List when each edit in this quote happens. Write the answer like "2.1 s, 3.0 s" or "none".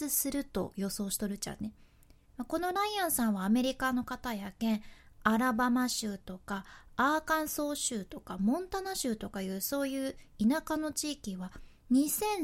2.2 s